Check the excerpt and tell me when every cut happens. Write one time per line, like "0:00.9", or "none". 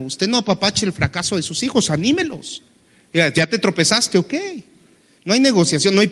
0:05.2